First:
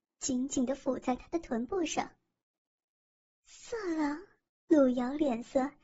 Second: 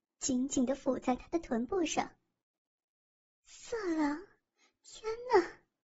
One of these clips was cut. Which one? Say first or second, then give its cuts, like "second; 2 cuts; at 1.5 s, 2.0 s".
first; 1 cut; at 4.5 s